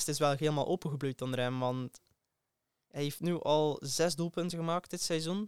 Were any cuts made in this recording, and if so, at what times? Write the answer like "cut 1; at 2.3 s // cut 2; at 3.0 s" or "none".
none

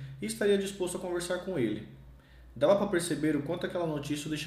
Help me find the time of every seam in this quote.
none

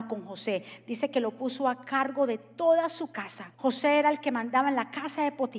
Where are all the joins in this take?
cut 1; at 3.5 s

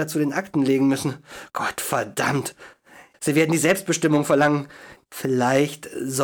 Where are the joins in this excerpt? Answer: cut 1; at 3.1 s // cut 2; at 5.0 s

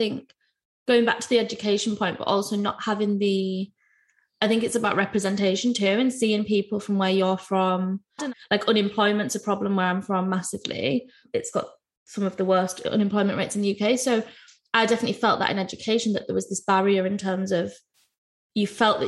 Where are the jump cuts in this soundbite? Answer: cut 1; at 8.2 s

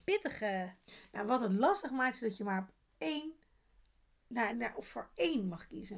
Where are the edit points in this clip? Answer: cut 1; at 4.5 s

